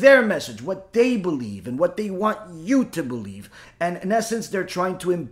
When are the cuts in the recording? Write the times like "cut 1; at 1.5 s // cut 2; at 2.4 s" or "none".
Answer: none